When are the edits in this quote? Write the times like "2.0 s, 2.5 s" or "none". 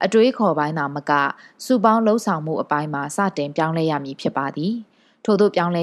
none